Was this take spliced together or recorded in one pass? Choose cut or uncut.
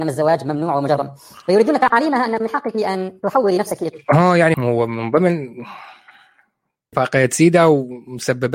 cut